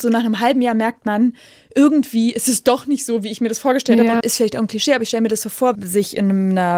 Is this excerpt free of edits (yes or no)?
no